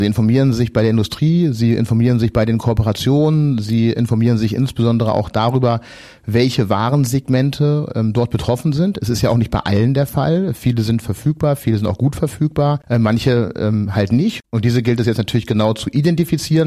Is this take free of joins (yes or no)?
yes